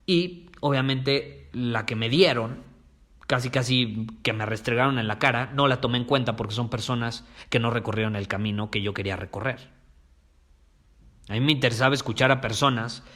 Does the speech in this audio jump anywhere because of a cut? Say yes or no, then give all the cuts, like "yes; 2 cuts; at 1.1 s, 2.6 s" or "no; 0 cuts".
no; 0 cuts